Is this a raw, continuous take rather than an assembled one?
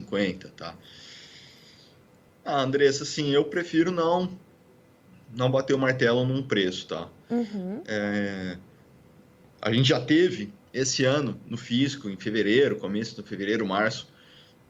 no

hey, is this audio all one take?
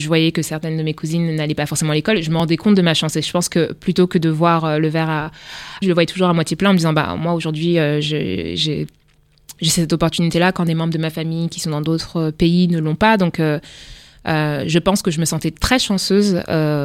no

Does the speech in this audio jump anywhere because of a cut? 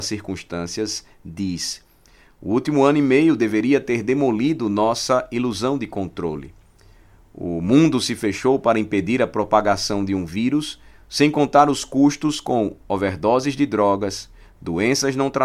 no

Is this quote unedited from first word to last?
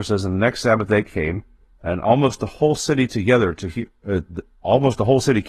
yes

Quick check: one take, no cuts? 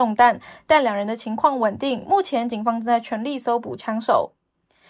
yes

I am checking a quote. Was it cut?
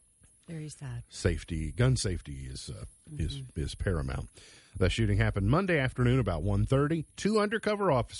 yes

